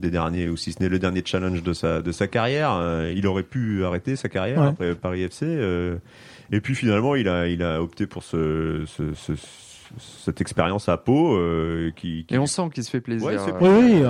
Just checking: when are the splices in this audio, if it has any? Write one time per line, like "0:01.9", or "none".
0:09.1